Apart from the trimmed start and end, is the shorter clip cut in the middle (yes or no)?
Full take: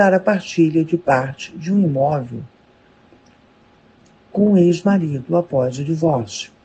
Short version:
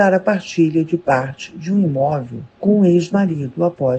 yes